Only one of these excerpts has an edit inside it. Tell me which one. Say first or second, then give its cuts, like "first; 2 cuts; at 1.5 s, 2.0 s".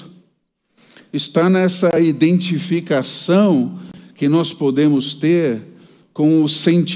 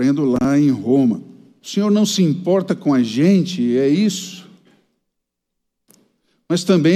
second; 1 cut; at 1.6 s